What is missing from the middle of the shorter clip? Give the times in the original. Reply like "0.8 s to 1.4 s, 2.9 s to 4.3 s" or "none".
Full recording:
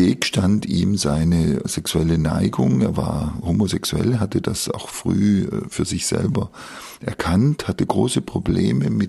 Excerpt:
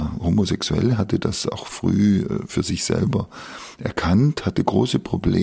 none